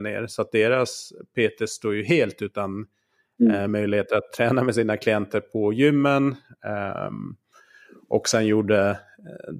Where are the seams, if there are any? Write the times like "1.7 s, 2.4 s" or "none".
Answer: none